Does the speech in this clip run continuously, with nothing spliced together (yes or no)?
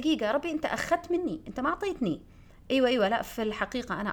yes